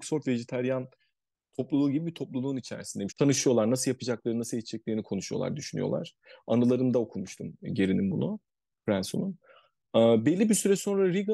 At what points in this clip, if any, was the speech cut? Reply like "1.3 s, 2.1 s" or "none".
3.1 s